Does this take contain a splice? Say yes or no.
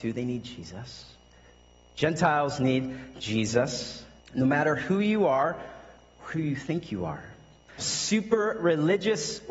yes